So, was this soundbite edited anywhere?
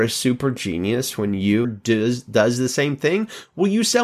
yes; 1 cut; at 1.6 s

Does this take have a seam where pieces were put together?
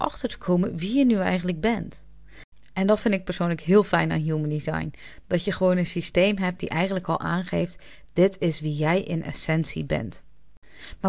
no; 0 cuts

